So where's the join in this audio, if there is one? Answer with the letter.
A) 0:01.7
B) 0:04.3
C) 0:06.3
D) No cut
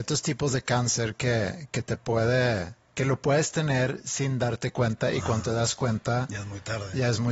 D